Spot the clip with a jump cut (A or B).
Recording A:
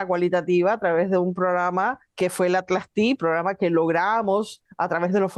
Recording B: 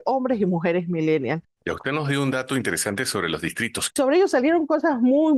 B